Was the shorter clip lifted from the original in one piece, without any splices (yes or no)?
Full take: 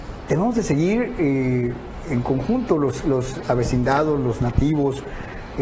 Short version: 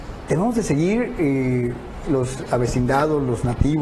no